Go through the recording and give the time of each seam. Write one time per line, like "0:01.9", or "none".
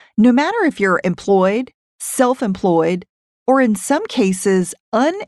none

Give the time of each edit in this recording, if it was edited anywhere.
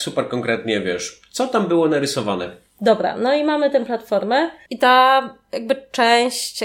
0:04.7

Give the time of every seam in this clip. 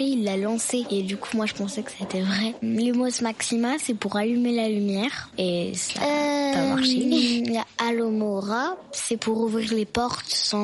none

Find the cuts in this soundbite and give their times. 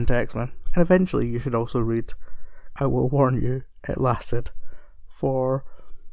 0:02.8

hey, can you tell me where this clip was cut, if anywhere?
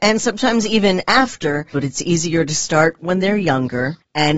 0:01.7

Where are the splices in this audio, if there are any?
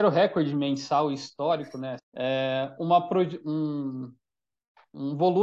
0:02.0

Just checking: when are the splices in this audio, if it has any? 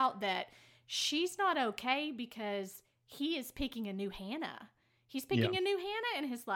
none

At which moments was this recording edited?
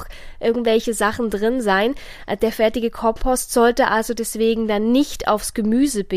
none

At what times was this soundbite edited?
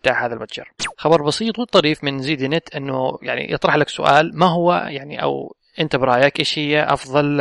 0:00.9

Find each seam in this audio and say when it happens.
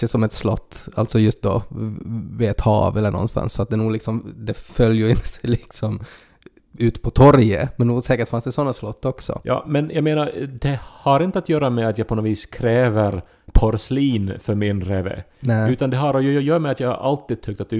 none

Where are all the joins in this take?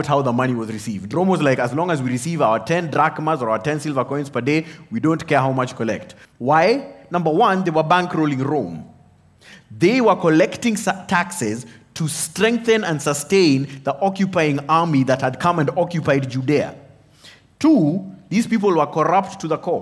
0:06.2

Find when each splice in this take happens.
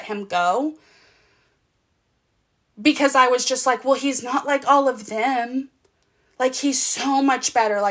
none

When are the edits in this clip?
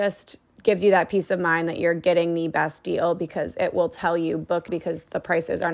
0:04.7

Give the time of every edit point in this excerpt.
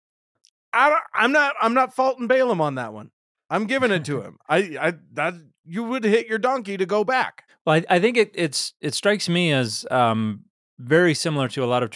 0:07.5

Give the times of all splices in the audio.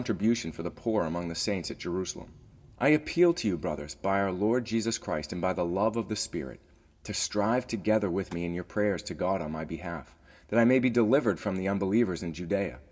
0:02.7

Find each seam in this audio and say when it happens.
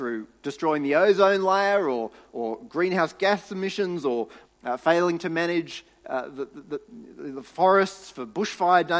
0:04.4

